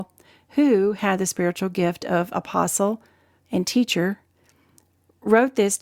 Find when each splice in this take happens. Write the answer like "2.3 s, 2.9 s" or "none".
3.4 s